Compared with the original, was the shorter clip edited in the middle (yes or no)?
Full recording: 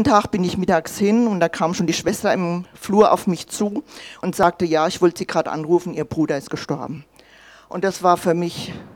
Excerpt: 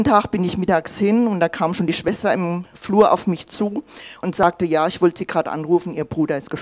no